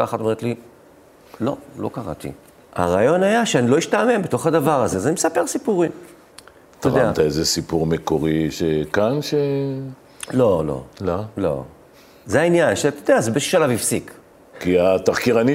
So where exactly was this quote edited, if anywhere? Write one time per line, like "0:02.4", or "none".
0:02.6

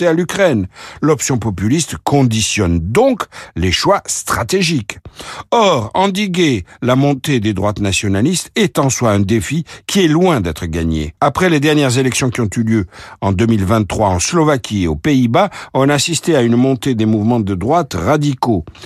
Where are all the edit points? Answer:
0:11.2

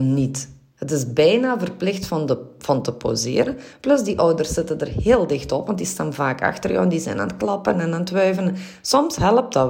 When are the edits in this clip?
none

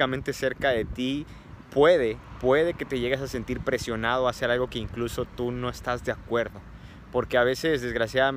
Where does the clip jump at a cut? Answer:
none

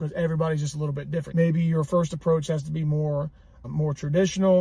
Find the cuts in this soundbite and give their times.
0:01.3
0:03.6

